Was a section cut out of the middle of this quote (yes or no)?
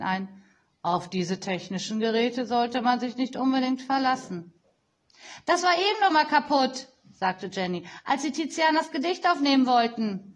yes